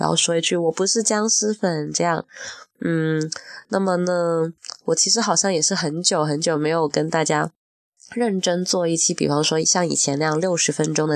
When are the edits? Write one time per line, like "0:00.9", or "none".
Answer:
none